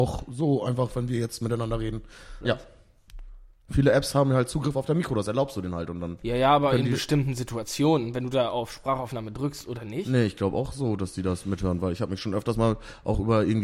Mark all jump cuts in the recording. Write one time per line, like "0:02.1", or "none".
0:02.4